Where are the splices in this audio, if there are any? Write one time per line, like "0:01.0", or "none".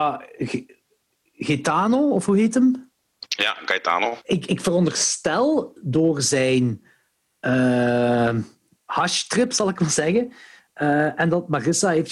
0:04.2

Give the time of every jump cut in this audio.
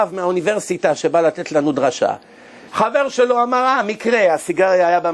0:02.7

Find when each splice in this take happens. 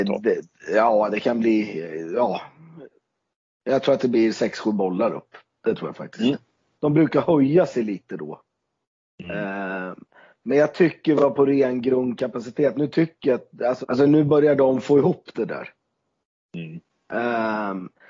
0:06.8
0:13.8

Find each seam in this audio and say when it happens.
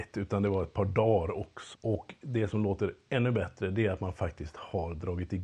0:01.7

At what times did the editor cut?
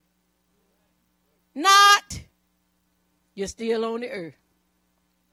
0:01.4

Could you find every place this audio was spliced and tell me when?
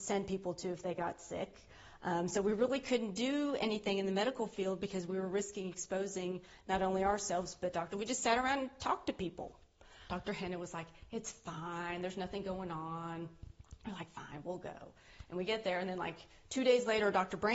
0:07.9
0:10.1

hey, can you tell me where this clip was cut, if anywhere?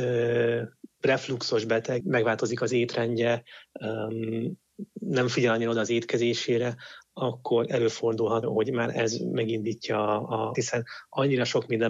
0:02.0
0:08.4
0:10.5

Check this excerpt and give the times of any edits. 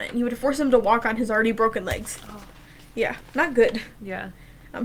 none

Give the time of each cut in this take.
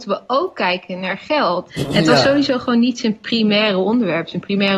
0:01.7

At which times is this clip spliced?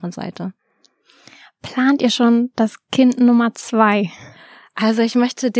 none

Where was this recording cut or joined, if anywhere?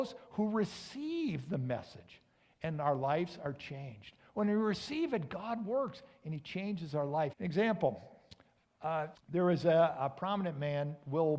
0:07.3
0:09.1

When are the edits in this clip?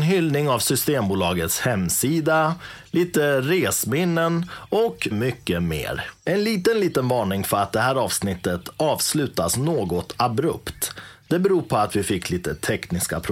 0:05.1

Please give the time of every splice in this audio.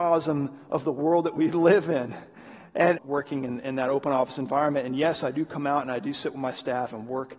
0:03.0

